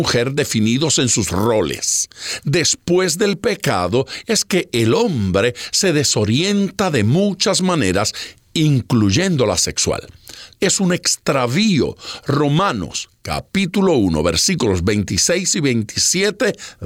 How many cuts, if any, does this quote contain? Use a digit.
1